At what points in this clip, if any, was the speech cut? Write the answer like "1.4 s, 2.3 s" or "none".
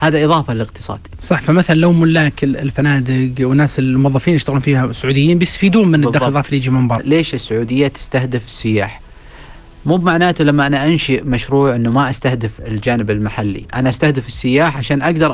7.0 s